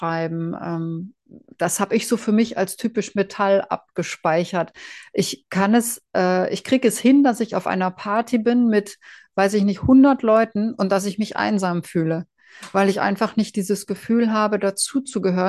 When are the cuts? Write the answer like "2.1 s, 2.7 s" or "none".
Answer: none